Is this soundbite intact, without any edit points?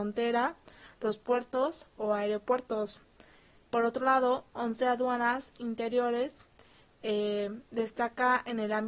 no; 1 cut; at 3.6 s

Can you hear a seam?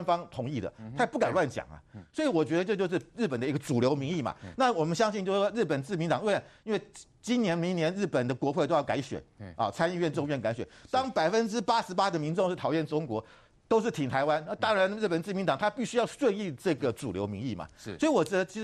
no; 0 cuts

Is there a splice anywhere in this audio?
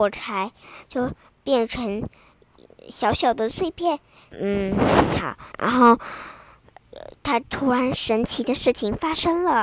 yes; 3 cuts; at 4.3 s, 5.5 s, 7.4 s

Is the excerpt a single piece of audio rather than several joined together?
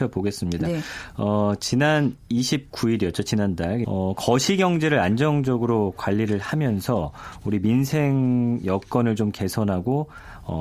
no; 1 cut; at 3.8 s

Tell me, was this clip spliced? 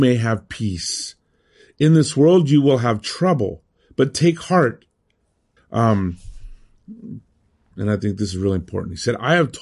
yes; 2 cuts; at 5.6 s, 7.7 s

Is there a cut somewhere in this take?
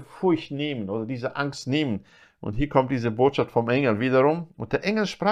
no; 0 cuts

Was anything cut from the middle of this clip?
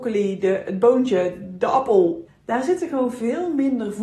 yes; 1 cut; at 2.3 s

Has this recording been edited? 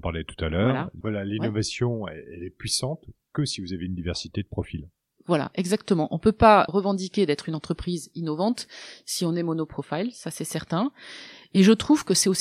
yes; 2 cuts; at 1.0 s, 6.7 s

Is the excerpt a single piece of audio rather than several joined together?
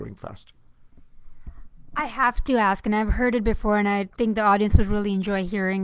yes; 0 cuts

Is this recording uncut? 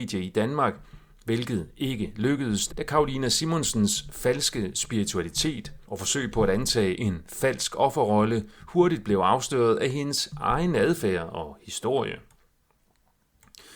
no; 2 cuts; at 2.7 s, 5.8 s

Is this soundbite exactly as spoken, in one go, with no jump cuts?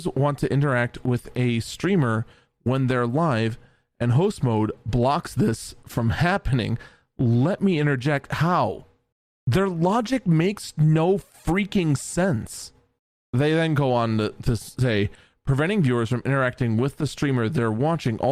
yes; 0 cuts

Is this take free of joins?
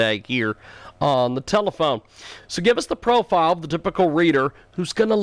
yes; 0 cuts

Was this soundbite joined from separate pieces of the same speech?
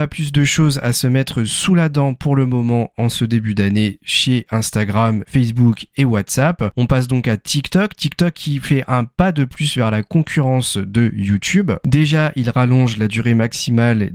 no; 0 cuts

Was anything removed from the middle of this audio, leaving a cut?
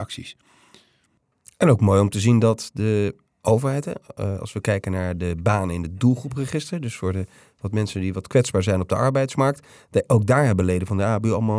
no; 0 cuts

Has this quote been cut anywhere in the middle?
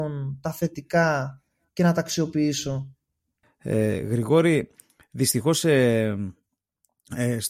no; 0 cuts

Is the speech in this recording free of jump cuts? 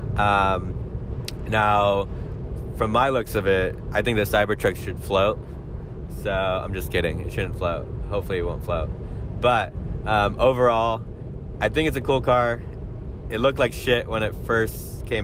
yes; 0 cuts

